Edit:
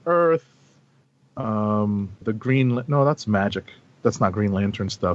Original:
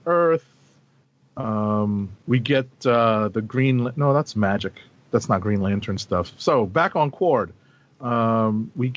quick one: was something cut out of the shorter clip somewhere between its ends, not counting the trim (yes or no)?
yes